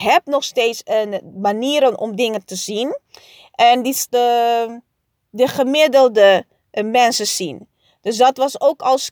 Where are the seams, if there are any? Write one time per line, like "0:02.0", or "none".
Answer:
0:04.1